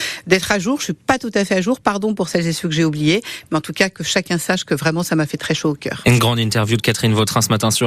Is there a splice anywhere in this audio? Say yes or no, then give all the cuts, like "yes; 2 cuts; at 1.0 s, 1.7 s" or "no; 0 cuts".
no; 0 cuts